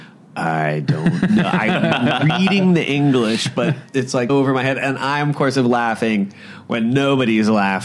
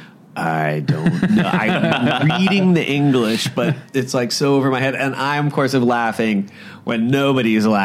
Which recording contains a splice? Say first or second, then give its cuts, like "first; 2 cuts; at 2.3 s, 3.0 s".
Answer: first; 1 cut; at 4.3 s